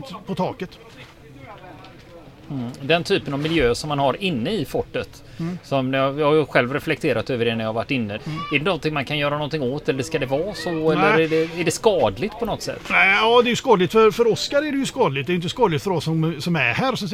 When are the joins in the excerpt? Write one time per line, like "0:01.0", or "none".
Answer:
0:08.2